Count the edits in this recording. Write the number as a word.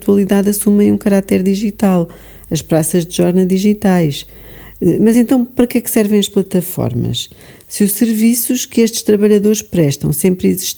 zero